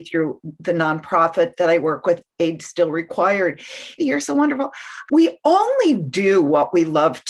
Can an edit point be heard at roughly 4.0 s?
yes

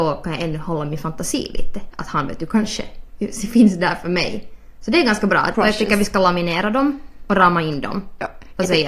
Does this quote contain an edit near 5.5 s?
yes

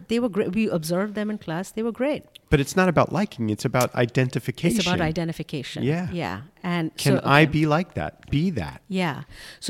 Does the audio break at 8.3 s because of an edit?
yes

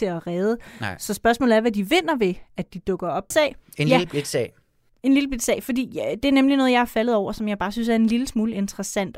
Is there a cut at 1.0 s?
no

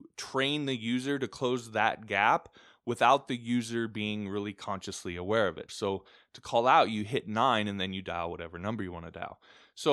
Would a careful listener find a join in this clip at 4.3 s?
no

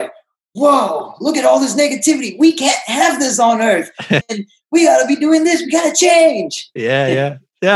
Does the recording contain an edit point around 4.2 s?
yes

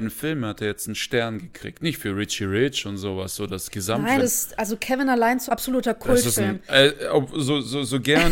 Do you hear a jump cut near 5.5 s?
yes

